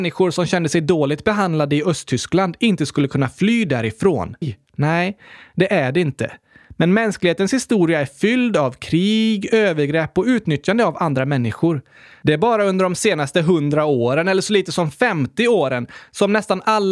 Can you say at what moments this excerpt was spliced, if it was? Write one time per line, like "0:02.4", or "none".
0:04.4